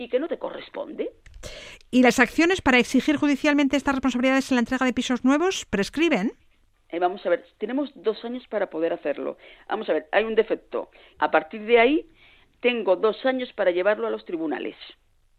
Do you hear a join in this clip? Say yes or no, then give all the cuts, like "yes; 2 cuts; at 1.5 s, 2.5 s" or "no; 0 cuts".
yes; 2 cuts; at 9.5 s, 11.1 s